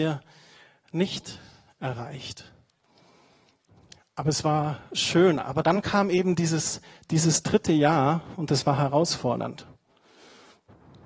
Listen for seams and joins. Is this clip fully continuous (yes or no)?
yes